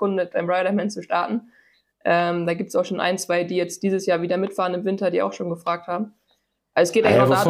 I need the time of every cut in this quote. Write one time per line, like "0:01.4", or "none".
none